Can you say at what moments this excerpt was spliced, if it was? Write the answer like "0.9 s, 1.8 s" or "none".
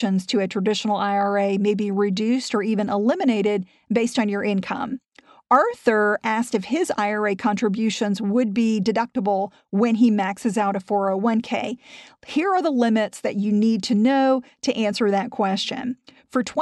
none